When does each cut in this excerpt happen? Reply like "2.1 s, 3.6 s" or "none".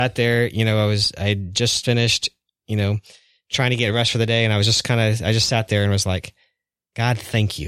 1.8 s